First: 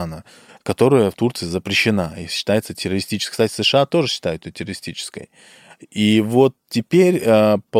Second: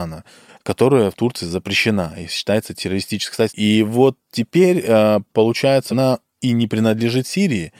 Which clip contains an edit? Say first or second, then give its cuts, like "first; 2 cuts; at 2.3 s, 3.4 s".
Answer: second; 2 cuts; at 3.5 s, 5.9 s